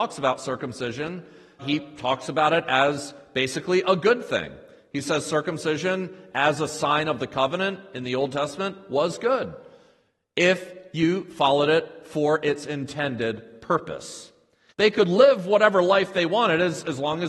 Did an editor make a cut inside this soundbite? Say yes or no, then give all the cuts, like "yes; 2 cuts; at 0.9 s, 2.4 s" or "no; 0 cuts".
yes; 2 cuts; at 1.6 s, 14.7 s